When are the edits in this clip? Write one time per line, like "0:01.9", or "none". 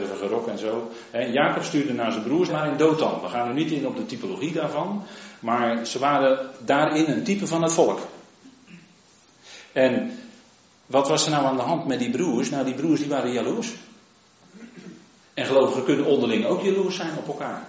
0:02.5
0:15.2